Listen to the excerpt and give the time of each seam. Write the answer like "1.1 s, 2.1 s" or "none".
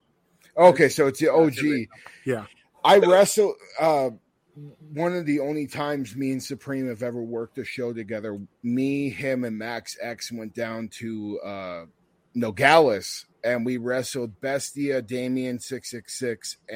none